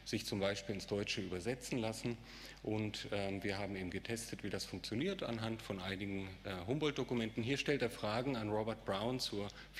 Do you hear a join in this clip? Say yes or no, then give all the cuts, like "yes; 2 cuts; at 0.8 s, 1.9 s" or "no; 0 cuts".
no; 0 cuts